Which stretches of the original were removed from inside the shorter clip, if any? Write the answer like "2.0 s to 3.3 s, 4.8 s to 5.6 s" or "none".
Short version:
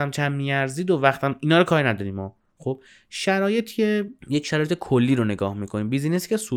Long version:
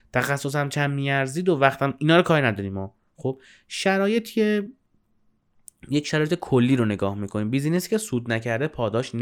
4.8 s to 5.8 s